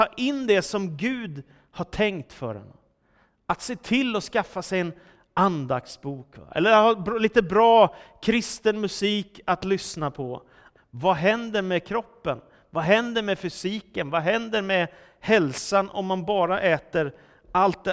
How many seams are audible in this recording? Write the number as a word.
one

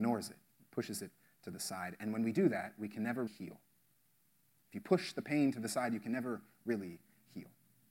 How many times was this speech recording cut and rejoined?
one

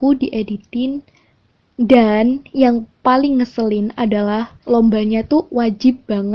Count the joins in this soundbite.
one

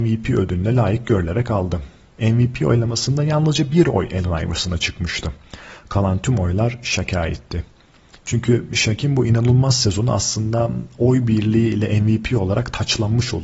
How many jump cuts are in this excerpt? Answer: one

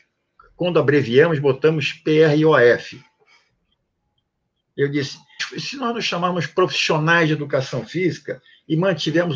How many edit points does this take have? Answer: one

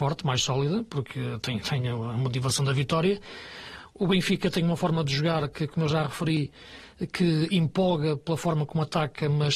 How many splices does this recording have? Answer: zero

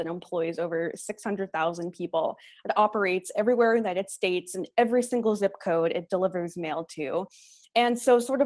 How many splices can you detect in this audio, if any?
zero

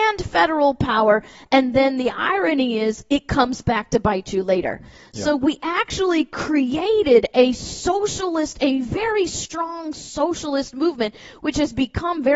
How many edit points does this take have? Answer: zero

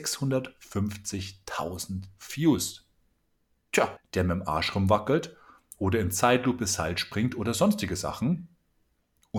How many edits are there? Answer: one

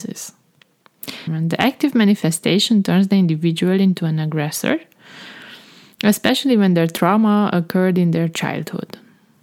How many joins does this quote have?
one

